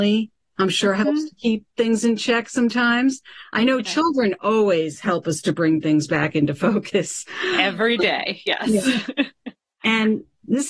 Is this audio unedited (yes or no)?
yes